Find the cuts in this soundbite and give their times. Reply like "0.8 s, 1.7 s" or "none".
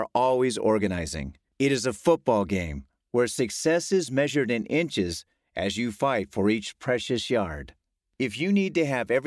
1.5 s